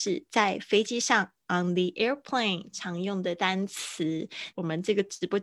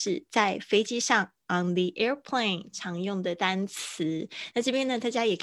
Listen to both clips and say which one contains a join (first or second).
first